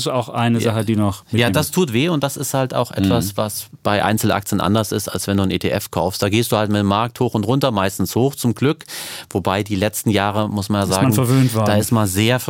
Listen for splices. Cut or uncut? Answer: uncut